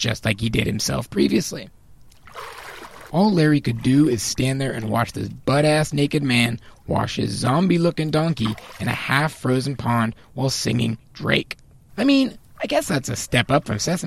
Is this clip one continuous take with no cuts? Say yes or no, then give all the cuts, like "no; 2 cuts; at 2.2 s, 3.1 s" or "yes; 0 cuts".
no; 2 cuts; at 3.1 s, 11.9 s